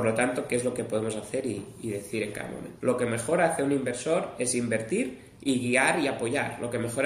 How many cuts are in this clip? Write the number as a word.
one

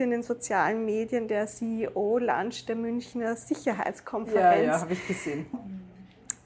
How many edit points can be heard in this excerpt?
one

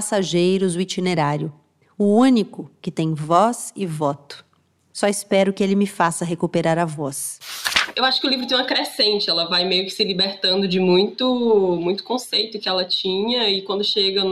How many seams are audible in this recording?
zero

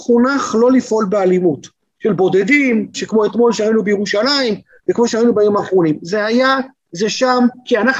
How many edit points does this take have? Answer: two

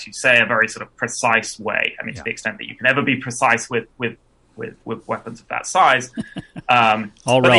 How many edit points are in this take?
zero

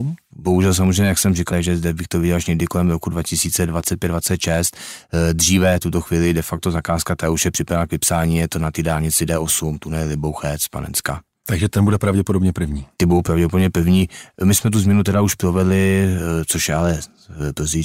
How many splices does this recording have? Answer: one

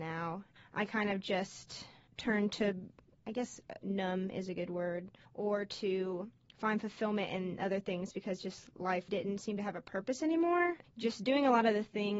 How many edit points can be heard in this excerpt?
one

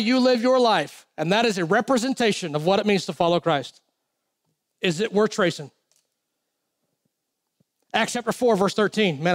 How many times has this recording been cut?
one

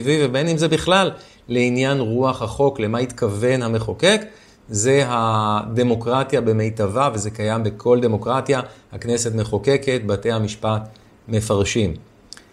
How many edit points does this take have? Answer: zero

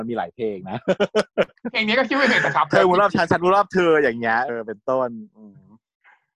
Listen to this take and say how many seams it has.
one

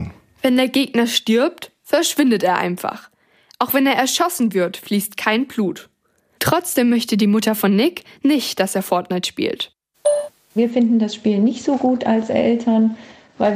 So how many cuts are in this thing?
zero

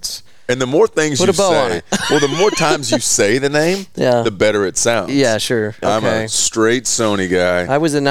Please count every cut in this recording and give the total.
one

